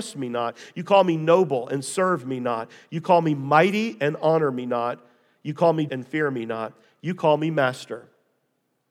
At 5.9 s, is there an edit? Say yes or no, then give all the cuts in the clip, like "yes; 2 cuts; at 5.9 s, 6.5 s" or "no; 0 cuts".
yes; 1 cut; at 5.9 s